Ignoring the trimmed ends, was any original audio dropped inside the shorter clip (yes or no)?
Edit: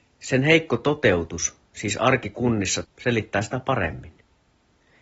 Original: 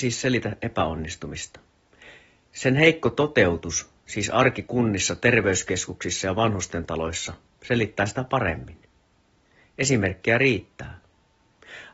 yes